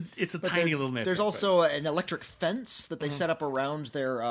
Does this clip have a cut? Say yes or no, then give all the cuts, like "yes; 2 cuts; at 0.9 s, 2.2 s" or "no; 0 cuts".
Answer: no; 0 cuts